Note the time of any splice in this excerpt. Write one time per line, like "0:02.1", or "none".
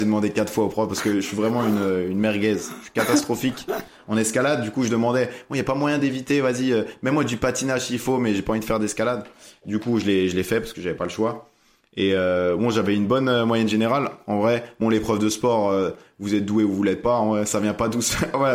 none